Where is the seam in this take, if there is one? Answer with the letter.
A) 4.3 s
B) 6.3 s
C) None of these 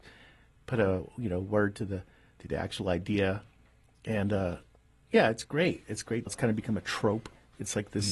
B